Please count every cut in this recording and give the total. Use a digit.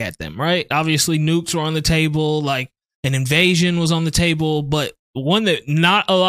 0